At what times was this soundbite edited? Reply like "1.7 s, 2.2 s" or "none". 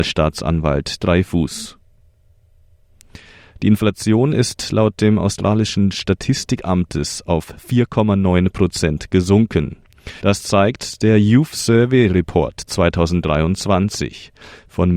10.2 s